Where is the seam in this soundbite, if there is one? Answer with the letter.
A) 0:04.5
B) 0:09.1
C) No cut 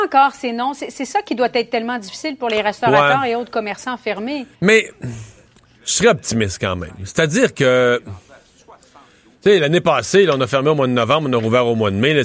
A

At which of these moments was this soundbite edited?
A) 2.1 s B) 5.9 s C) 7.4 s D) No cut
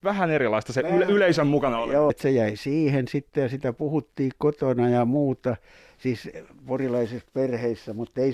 A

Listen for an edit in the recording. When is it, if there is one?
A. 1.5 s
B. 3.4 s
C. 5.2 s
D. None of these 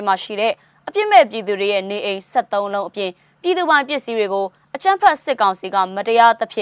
D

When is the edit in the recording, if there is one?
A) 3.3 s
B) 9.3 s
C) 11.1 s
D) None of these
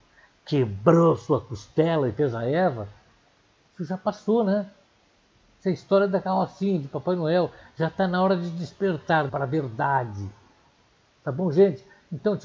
B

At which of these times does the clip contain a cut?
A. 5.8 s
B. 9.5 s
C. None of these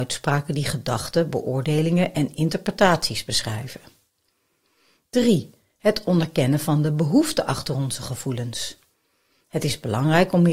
B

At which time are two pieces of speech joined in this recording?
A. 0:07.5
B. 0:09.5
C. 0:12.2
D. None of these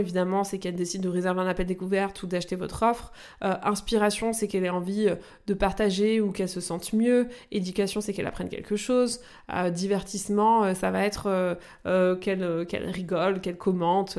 D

